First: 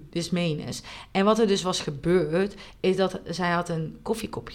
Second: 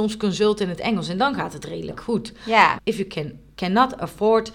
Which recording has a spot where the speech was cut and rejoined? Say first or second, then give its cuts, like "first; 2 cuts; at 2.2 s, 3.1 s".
second; 1 cut; at 2.8 s